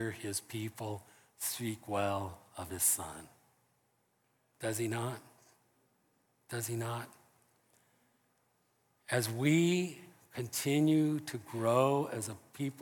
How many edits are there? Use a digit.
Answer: 0